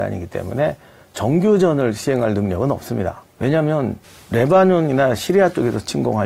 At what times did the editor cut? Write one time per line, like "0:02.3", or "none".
0:03.2